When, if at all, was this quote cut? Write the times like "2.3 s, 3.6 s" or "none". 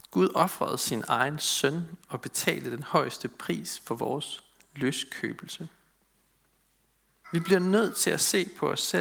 7.2 s